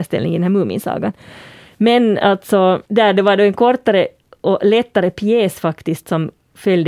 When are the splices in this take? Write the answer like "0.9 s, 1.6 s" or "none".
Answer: 2.9 s